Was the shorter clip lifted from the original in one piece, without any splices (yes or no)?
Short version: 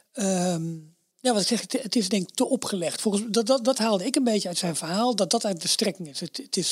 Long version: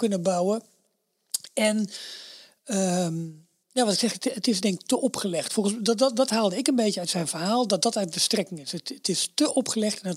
yes